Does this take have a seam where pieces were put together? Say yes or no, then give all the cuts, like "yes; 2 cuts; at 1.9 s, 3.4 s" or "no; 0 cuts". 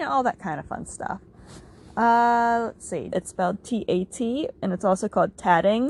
yes; 1 cut; at 3.1 s